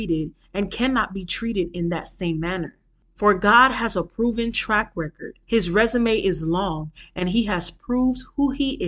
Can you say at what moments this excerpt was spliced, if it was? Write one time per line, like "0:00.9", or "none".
0:05.4

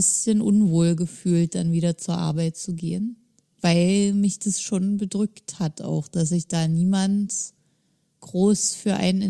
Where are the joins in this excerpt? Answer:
0:03.6

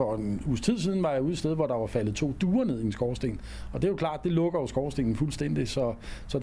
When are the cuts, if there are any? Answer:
none

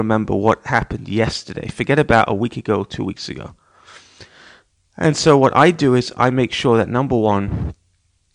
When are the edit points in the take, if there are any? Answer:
none

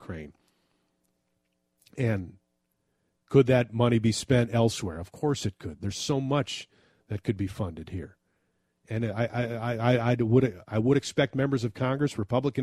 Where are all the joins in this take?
none

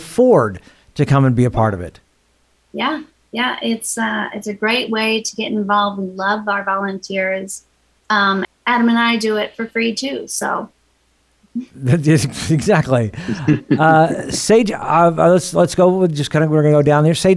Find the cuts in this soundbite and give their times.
0:08.4

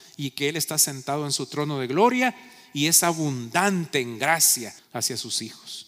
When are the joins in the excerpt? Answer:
0:04.8

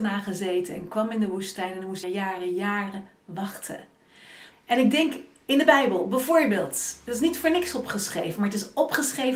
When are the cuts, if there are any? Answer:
0:02.0
0:04.5

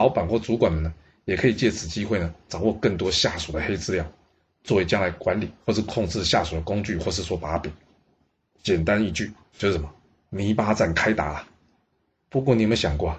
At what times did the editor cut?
0:08.4

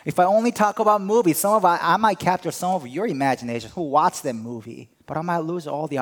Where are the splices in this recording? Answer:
0:05.0

